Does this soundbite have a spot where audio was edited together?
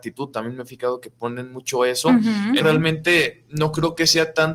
yes; 1 cut; at 2.6 s

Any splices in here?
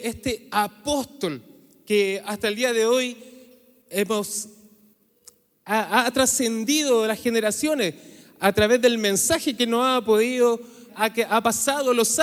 yes; 1 cut; at 10.9 s

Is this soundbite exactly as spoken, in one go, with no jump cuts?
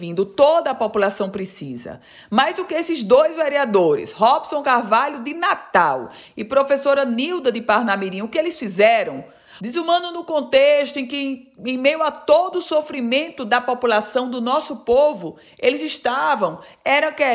no; 1 cut; at 9.6 s

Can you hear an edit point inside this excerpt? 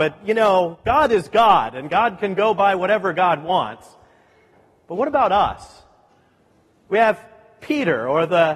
no; 0 cuts

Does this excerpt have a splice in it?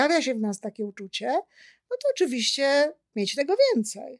no; 0 cuts

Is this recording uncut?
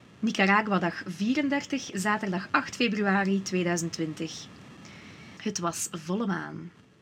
no; 1 cut; at 5.4 s

